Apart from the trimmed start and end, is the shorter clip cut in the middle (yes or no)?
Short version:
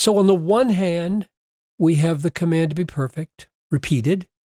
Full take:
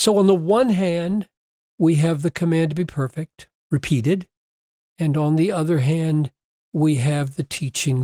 no